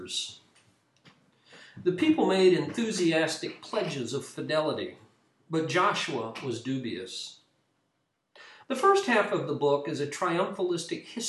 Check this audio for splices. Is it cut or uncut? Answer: cut